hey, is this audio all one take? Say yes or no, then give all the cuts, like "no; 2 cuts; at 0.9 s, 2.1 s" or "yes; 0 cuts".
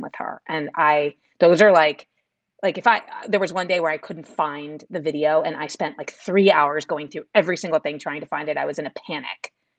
yes; 0 cuts